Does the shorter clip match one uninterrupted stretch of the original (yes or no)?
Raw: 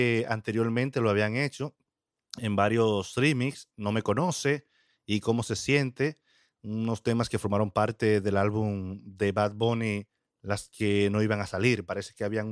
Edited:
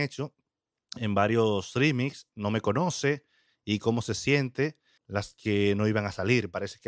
no